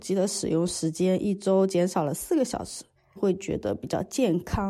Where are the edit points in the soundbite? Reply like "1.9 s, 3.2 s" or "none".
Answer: 3.2 s